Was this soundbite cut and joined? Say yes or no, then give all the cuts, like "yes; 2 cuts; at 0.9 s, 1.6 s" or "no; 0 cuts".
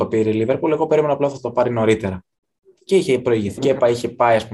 yes; 1 cut; at 3.6 s